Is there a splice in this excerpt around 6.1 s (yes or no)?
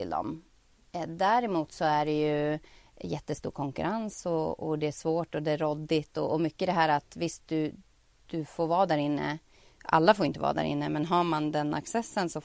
no